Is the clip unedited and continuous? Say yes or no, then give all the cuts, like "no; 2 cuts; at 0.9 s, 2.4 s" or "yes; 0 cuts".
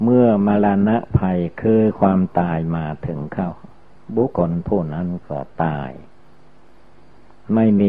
no; 1 cut; at 4.3 s